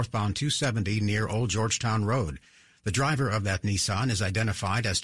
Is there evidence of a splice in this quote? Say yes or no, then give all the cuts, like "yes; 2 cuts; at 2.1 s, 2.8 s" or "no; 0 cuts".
no; 0 cuts